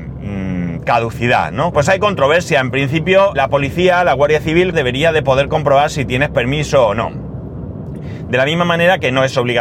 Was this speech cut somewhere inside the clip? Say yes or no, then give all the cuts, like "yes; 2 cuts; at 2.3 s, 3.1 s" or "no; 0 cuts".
yes; 3 cuts; at 1.7 s, 3.4 s, 4.7 s